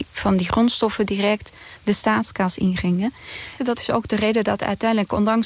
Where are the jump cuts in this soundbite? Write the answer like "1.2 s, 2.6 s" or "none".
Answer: 3.6 s

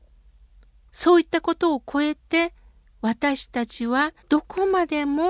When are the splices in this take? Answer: 4.2 s

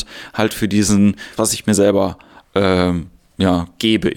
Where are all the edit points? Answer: 1.4 s

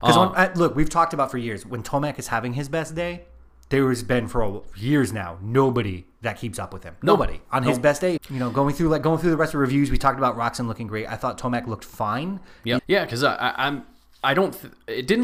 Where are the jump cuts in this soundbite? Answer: 8.2 s, 12.8 s

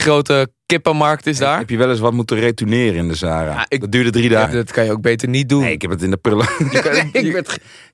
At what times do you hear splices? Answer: 4.4 s

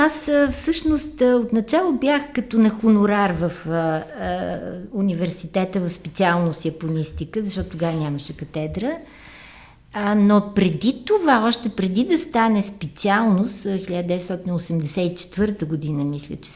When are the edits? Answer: none

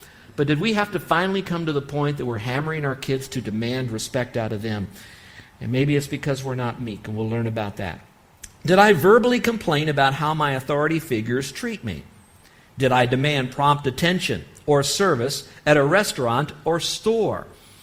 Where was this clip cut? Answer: none

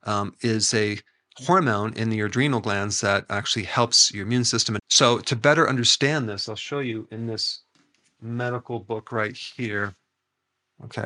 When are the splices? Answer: 4.8 s

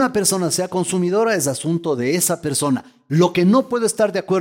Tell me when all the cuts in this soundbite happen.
none

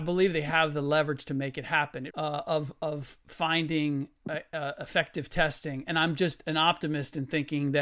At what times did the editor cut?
2.1 s

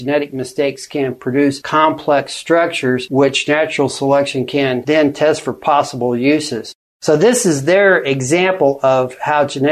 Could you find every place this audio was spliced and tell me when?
none

